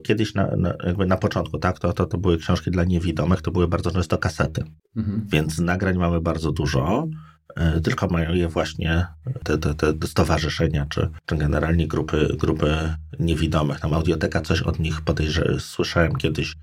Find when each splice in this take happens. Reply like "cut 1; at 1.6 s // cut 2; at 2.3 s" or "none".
none